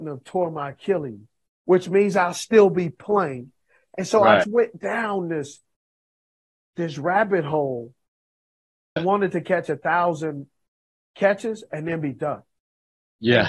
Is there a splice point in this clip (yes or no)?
yes